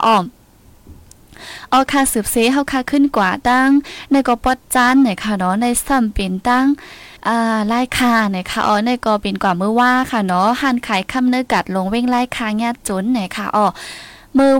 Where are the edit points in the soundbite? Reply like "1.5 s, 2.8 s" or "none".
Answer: 7.2 s